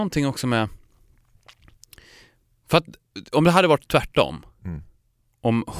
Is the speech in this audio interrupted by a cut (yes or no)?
no